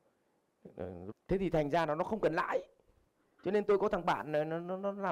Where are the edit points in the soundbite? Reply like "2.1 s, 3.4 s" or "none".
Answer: 1.1 s